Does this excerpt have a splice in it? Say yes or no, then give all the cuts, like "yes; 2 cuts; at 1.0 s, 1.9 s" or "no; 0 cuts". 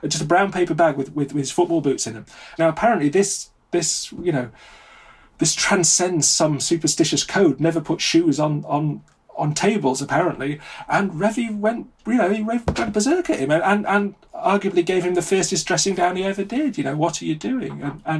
yes; 1 cut; at 2.6 s